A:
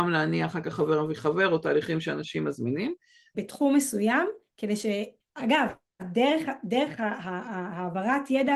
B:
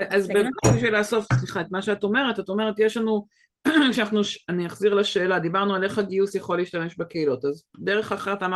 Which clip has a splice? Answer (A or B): A